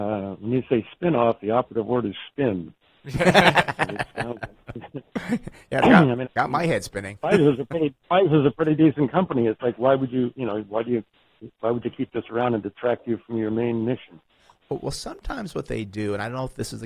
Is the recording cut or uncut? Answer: cut